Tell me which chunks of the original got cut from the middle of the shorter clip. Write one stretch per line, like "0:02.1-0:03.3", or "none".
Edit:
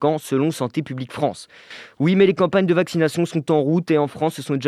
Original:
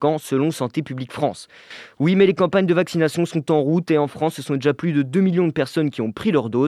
none